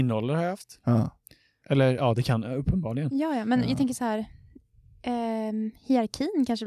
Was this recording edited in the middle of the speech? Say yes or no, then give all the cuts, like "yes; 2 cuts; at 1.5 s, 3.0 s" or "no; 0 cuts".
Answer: yes; 1 cut; at 1.6 s